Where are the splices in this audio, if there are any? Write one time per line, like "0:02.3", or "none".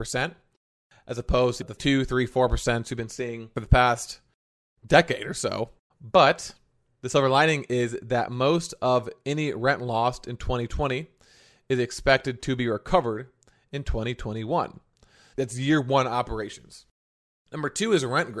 0:05.9
0:15.3